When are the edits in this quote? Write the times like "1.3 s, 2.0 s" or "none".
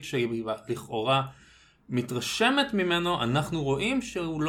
none